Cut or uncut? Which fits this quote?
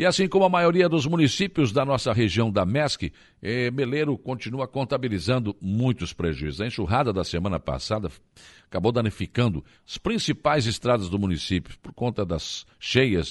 uncut